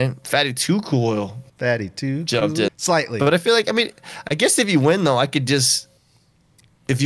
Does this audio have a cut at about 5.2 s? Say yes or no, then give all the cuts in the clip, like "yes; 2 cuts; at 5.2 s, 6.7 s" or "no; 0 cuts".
no; 1 cut; at 2.7 s